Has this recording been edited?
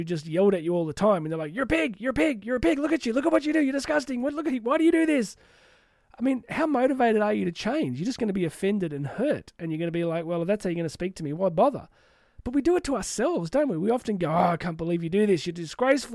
no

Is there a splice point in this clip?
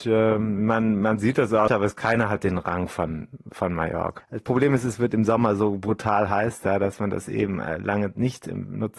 yes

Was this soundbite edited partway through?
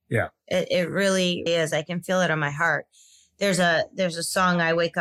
yes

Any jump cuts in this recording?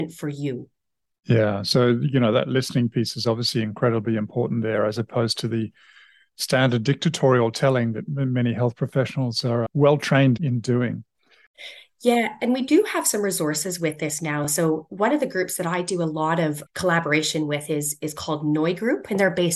no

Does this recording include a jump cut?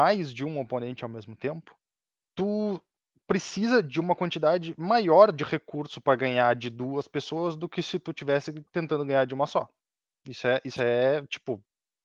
no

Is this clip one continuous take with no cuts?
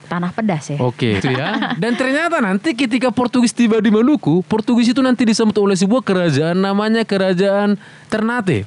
no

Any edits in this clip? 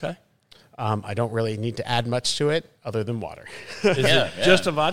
no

